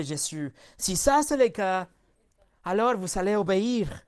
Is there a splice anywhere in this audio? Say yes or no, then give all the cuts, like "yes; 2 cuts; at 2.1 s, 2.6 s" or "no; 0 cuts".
no; 0 cuts